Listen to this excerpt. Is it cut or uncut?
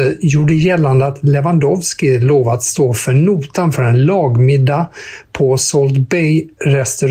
uncut